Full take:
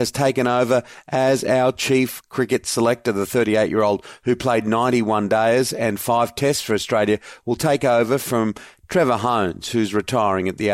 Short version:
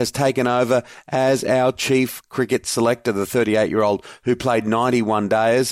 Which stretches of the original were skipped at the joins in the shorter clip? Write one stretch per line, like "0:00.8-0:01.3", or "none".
none